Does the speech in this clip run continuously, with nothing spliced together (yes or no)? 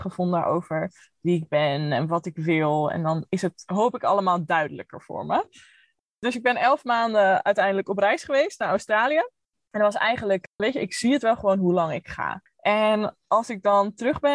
no